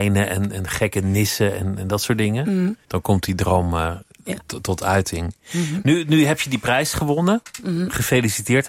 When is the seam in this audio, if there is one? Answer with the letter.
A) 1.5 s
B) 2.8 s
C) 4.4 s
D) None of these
B